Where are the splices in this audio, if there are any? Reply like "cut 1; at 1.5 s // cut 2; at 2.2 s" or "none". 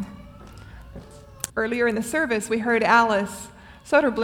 cut 1; at 1.5 s